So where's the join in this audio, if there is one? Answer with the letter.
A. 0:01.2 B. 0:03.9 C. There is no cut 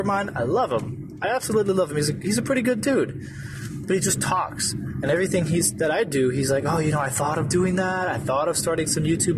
C